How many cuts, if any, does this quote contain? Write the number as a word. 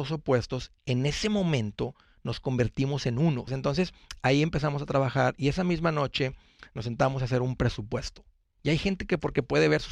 two